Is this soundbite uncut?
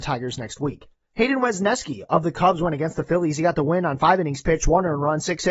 yes; 0 cuts

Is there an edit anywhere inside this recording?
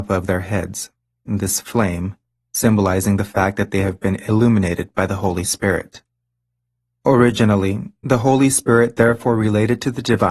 no; 0 cuts

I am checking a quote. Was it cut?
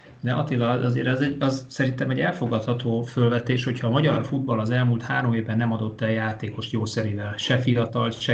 no; 0 cuts

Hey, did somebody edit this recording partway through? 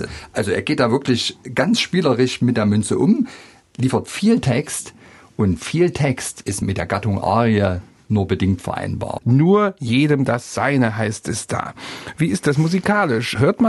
yes; 1 cut; at 9.2 s

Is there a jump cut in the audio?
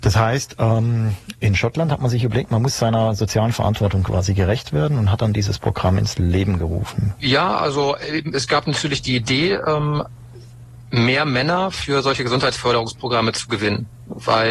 yes; 1 cut; at 7.2 s

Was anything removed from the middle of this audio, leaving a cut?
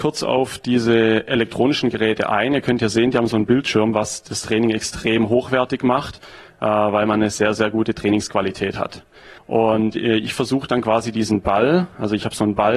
yes; 1 cut; at 9.4 s

